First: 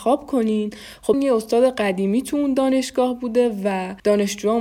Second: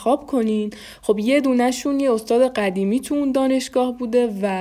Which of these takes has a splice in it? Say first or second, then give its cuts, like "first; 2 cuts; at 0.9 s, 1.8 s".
first; 1 cut; at 1.1 s